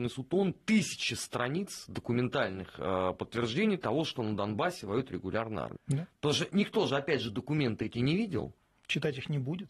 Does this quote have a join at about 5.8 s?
yes; 1 cut; at 5.8 s

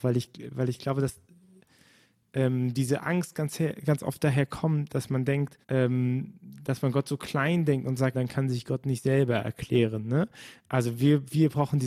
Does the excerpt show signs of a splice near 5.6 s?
yes; 2 cuts; at 5.6 s, 8.1 s

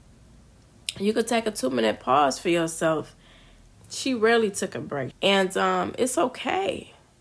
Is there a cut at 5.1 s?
yes; 2 cuts; at 3.7 s, 5.1 s

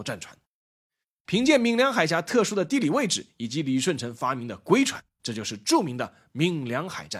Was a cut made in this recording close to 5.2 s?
yes; 1 cut; at 5.2 s

